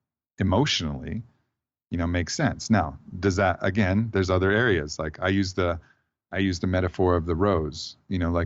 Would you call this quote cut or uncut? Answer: uncut